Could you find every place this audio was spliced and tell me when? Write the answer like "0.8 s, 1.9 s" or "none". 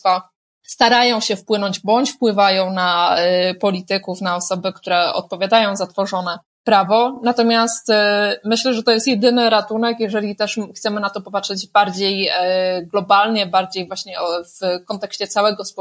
none